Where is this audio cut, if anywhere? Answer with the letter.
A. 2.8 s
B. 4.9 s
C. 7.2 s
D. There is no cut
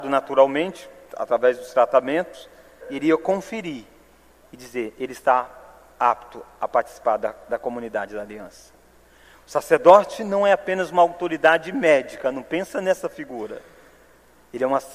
A